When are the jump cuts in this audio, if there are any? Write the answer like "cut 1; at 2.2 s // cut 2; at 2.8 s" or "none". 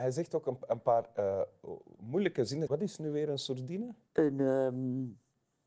cut 1; at 2.7 s // cut 2; at 4.1 s